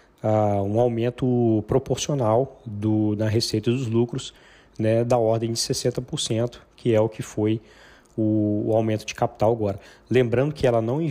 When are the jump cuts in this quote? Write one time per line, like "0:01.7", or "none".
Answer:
none